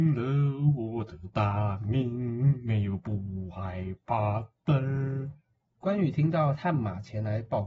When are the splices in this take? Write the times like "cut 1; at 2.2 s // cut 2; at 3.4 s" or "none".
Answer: cut 1; at 5.6 s